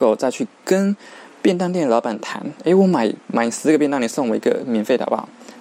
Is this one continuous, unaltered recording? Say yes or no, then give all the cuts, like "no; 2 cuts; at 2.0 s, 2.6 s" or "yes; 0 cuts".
yes; 0 cuts